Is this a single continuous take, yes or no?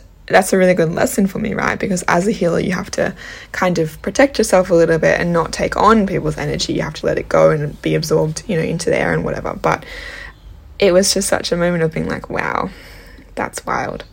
no